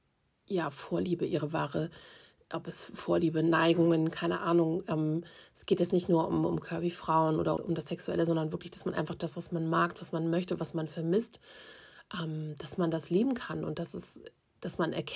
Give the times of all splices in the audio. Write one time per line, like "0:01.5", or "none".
0:07.6